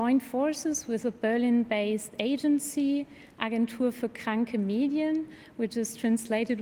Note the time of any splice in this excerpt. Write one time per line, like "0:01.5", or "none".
none